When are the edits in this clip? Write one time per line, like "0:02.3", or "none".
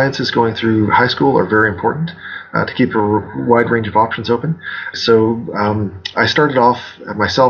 0:04.9